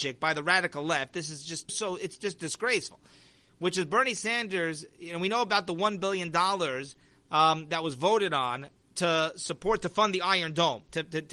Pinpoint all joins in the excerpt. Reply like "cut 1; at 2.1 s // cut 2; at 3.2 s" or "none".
cut 1; at 1.7 s

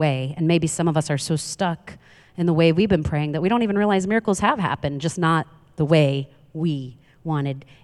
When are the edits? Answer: none

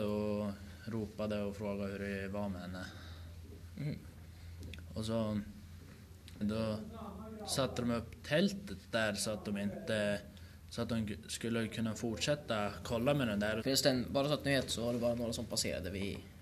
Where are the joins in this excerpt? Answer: cut 1; at 6.4 s // cut 2; at 13.6 s

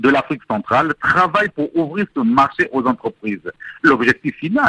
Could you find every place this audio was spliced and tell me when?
none

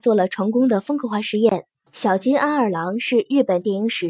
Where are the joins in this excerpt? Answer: cut 1; at 1.9 s

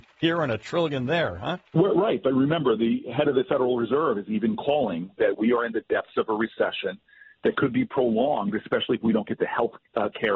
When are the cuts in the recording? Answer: cut 1; at 1.7 s

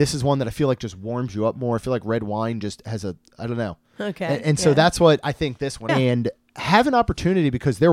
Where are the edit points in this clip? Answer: cut 1; at 4.0 s // cut 2; at 5.9 s

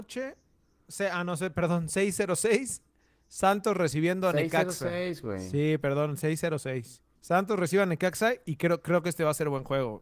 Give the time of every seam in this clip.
none

